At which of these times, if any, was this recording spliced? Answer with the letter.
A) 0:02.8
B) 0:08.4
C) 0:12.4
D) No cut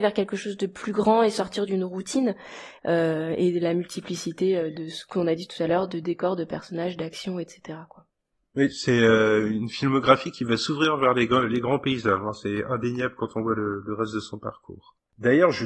A